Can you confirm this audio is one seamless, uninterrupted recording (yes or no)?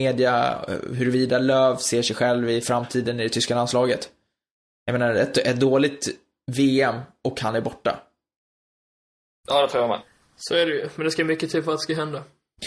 yes